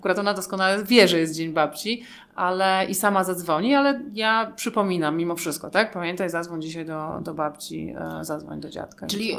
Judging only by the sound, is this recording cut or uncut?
uncut